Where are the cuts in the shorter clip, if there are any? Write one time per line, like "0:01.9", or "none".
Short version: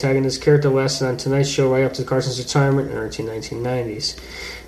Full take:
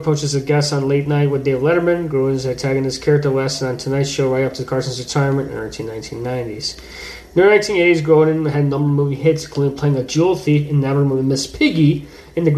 none